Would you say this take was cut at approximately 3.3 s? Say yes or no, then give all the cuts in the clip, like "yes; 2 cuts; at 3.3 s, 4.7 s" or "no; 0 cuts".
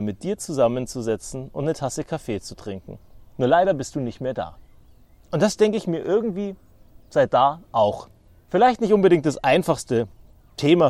no; 2 cuts; at 5.2 s, 8.4 s